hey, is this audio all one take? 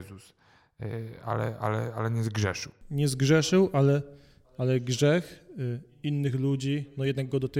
yes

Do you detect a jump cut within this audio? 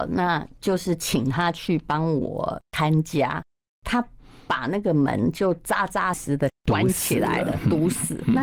yes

